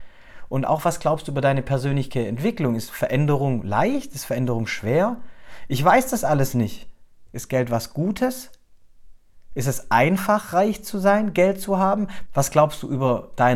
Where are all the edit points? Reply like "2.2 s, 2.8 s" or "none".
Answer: 7.3 s, 12.3 s